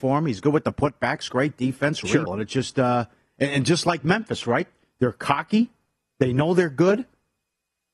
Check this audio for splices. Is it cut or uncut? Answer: cut